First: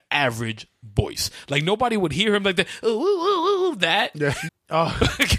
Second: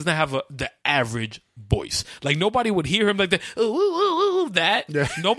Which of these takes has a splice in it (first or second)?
first